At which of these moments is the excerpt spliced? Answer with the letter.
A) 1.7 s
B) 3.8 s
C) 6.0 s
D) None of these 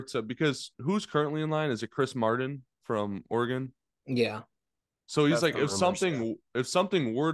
D